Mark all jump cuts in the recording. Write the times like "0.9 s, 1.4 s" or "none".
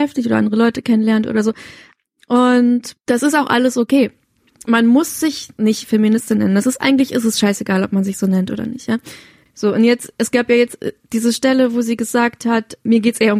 none